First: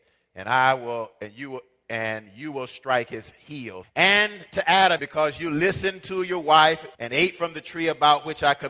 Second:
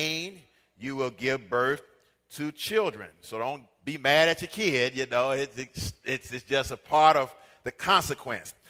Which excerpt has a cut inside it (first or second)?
first